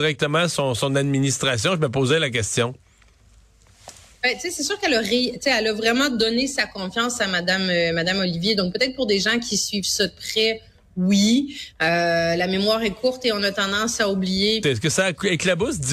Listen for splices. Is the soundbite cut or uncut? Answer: cut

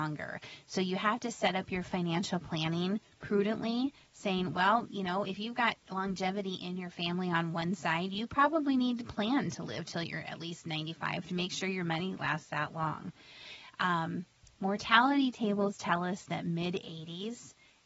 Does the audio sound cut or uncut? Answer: uncut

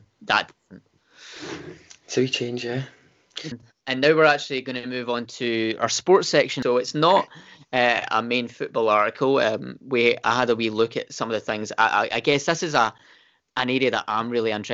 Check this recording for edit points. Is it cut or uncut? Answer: cut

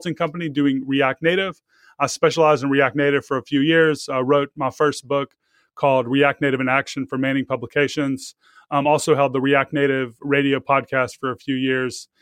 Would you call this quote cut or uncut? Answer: uncut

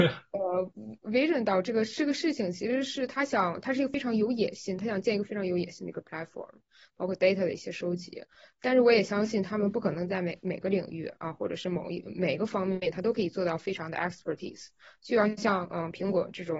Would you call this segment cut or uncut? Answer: uncut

